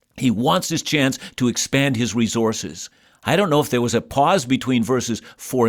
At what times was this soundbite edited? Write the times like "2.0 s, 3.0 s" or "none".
none